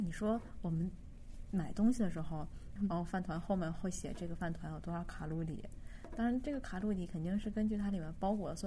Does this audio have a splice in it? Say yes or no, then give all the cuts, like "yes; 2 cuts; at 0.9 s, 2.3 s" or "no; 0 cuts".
yes; 1 cut; at 2.8 s